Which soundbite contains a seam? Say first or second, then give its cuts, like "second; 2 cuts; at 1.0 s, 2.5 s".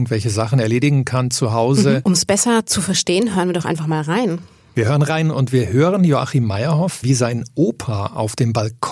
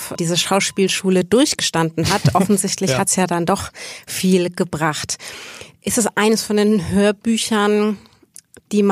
first; 2 cuts; at 2.0 s, 7.0 s